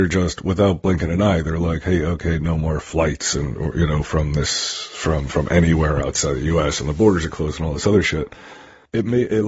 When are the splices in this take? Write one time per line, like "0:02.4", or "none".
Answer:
none

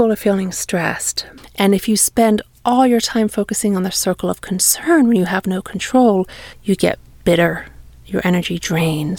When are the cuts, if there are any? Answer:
0:01.4
0:06.5

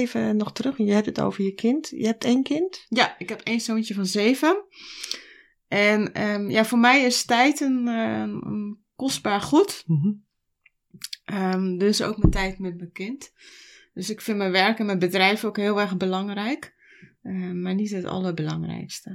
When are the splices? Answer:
none

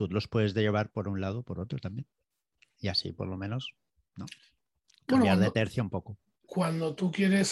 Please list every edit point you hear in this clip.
none

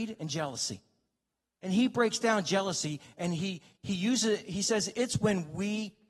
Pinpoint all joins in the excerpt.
none

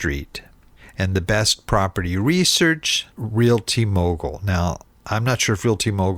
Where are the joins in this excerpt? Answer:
0:03.1

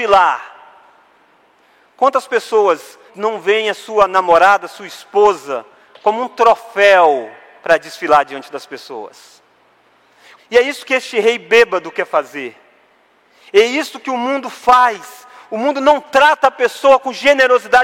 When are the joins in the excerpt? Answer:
0:03.1
0:10.4

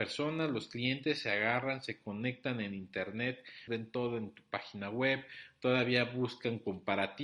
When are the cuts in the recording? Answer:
0:03.7

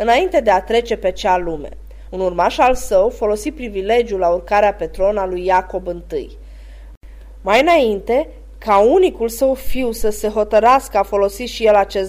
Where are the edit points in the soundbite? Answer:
0:02.1

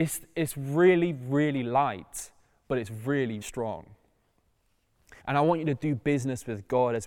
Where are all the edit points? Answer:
0:03.4
0:05.2

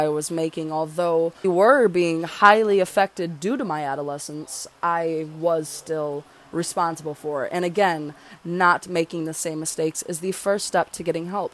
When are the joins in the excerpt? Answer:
0:01.4
0:08.4

